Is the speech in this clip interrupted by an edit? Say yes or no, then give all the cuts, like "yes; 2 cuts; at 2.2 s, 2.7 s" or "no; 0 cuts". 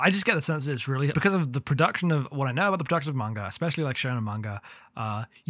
yes; 1 cut; at 1.1 s